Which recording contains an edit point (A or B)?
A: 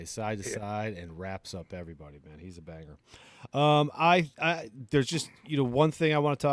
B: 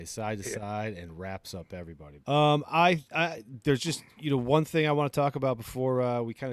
B